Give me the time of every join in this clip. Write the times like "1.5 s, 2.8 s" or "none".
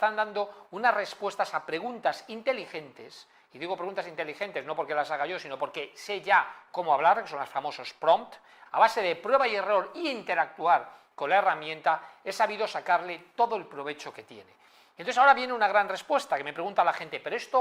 8.7 s